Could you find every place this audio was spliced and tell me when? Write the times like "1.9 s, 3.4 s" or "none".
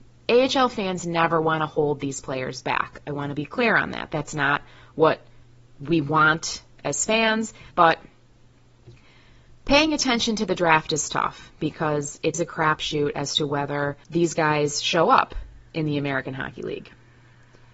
7.7 s, 12.3 s, 14.0 s

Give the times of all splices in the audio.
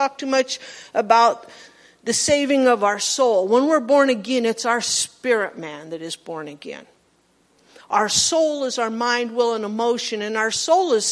none

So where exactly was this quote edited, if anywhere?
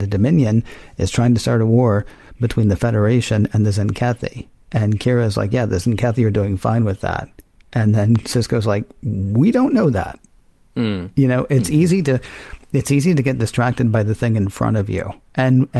none

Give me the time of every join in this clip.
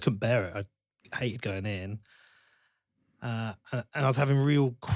none

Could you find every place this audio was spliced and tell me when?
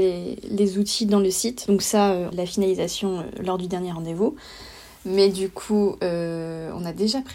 2.3 s

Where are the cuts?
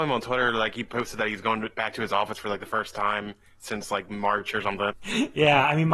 4.9 s

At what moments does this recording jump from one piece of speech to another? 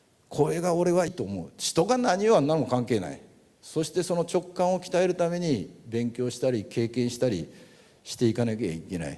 1.1 s

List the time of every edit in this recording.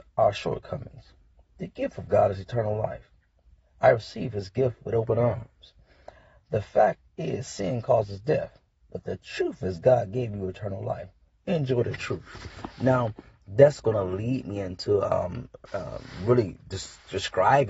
15.7 s

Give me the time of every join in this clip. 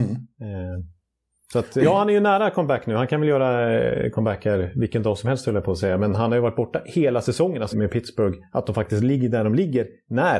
1.8 s, 7.7 s

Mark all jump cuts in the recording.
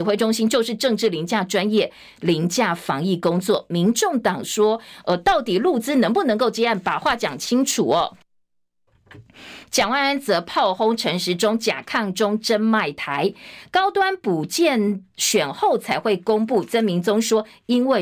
none

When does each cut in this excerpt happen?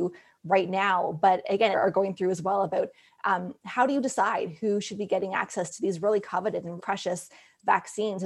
1.7 s, 6.8 s

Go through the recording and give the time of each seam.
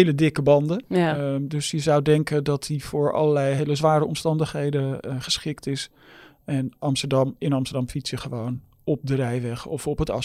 none

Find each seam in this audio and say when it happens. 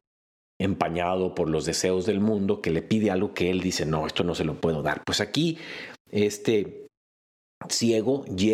none

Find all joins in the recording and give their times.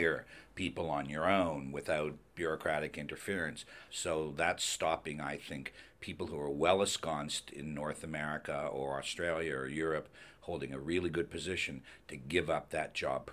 3.9 s

